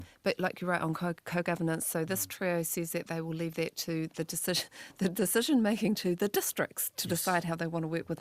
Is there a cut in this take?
no; 0 cuts

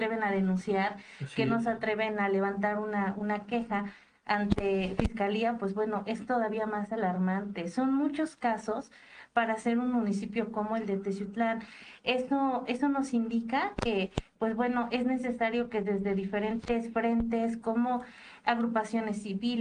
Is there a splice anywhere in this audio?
no; 0 cuts

